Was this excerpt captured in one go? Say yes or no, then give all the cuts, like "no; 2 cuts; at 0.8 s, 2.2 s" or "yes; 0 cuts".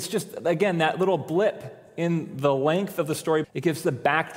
no; 1 cut; at 3.4 s